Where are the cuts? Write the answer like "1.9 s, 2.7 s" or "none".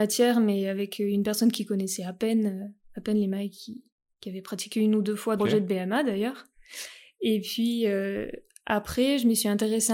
5.4 s